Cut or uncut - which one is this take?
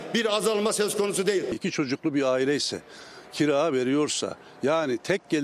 uncut